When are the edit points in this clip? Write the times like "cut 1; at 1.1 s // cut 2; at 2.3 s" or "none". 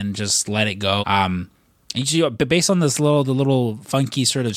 cut 1; at 1.0 s

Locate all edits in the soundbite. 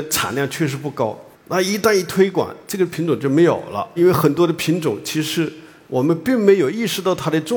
cut 1; at 1.3 s // cut 2; at 4.0 s

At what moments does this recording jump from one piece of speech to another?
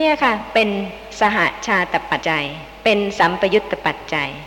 cut 1; at 2.2 s

